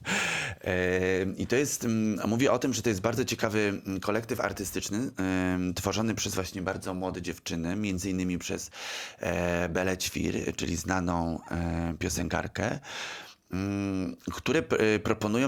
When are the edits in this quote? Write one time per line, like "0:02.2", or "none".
none